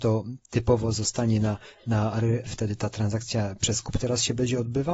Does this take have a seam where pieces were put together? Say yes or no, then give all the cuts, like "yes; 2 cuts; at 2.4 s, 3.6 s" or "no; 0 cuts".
yes; 1 cut; at 2.5 s